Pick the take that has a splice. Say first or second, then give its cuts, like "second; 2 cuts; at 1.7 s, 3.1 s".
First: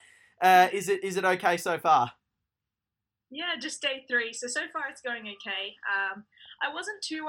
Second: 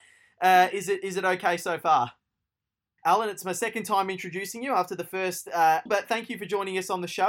second; 2 cuts; at 3.0 s, 5.9 s